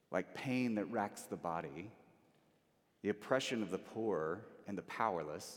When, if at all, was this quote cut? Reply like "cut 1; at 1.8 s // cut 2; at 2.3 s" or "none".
cut 1; at 2.8 s